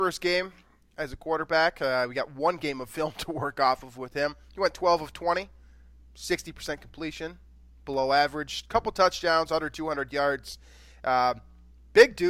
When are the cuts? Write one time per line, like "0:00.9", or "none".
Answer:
none